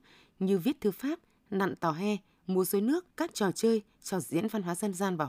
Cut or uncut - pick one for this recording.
cut